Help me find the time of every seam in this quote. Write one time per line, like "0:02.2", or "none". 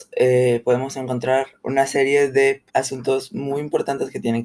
0:01.6
0:02.7